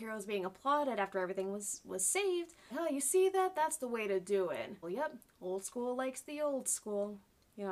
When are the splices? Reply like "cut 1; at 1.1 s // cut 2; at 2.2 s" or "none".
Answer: cut 1; at 2.7 s // cut 2; at 4.8 s